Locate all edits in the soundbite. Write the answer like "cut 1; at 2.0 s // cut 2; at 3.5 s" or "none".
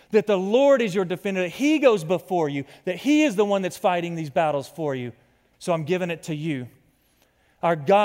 cut 1; at 5.5 s

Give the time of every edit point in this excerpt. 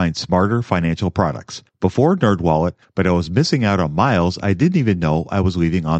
cut 1; at 1.7 s // cut 2; at 2.8 s

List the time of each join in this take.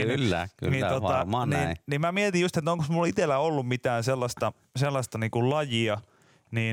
none

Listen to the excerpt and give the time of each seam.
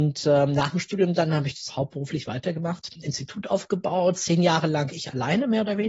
cut 1; at 1.7 s

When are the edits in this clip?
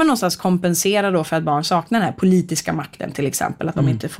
none

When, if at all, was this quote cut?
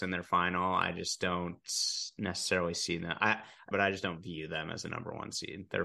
cut 1; at 3.7 s

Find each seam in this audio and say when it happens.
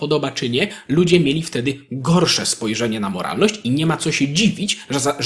none

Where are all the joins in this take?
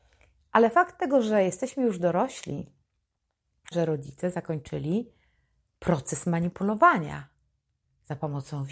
cut 1; at 3.7 s

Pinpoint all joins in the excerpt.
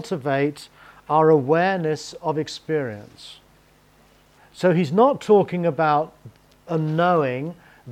cut 1; at 4.4 s

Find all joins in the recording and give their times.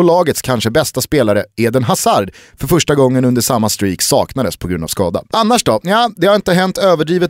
none

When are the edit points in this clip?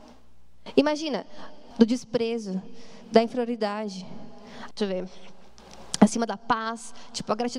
cut 1; at 1.7 s // cut 2; at 4.7 s

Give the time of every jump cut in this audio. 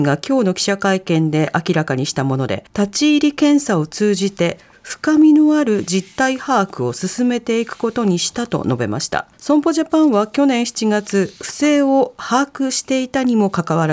cut 1; at 2.7 s // cut 2; at 9.3 s

